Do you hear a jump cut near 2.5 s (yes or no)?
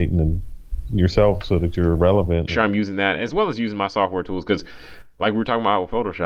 yes